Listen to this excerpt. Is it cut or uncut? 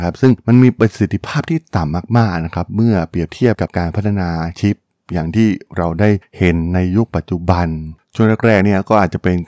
cut